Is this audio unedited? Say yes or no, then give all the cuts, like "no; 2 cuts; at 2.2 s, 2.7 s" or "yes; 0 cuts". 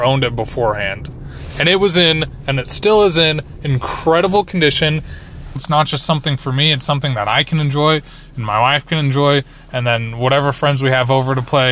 no; 1 cut; at 5.6 s